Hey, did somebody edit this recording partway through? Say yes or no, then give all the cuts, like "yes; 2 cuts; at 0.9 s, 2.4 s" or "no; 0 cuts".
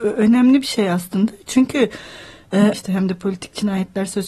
yes; 1 cut; at 2.7 s